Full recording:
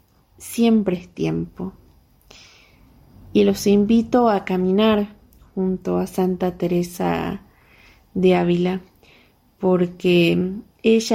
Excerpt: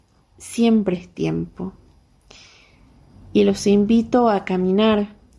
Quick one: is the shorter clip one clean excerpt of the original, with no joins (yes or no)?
yes